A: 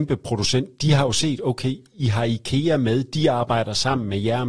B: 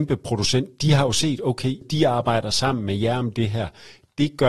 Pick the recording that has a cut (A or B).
B